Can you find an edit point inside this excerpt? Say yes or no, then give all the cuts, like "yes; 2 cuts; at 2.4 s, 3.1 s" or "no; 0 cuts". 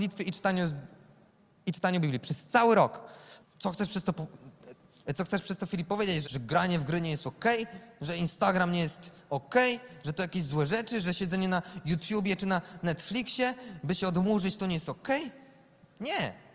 yes; 2 cuts; at 3.4 s, 6.2 s